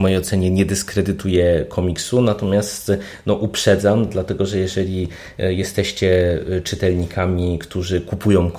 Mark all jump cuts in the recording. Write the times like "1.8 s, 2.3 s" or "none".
none

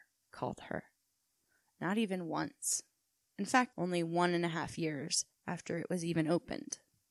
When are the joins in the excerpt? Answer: 3.7 s

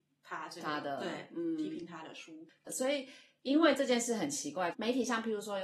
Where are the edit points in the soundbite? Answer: 4.7 s

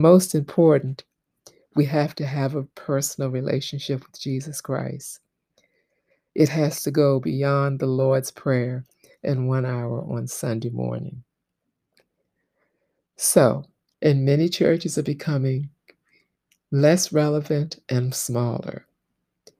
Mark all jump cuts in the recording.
13.9 s

